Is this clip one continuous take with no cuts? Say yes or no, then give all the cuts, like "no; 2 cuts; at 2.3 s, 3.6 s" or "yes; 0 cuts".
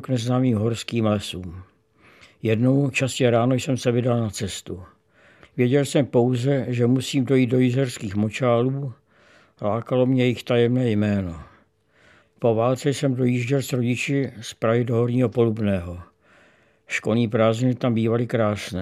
no; 2 cuts; at 5.4 s, 12.2 s